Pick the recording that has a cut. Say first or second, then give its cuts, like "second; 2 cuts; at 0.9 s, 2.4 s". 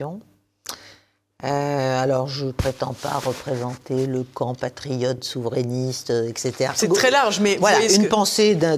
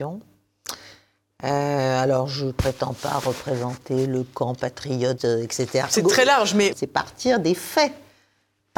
second; 2 cuts; at 5.2 s, 6.7 s